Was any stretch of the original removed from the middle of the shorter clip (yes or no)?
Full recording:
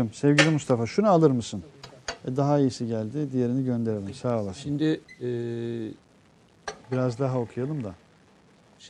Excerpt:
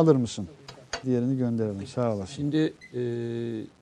yes